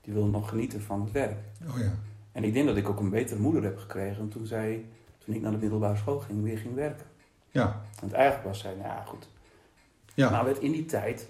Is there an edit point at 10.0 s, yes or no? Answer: yes